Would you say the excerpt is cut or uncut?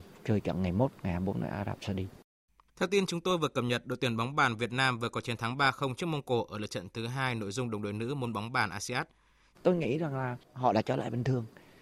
cut